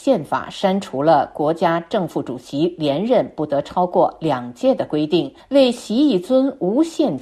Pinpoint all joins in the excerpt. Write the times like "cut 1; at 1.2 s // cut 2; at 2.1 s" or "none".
none